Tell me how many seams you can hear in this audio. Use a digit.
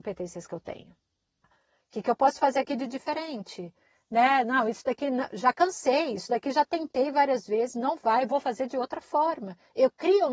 1